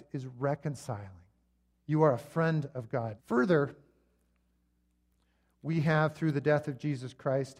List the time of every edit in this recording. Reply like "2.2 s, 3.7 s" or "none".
1.7 s, 3.2 s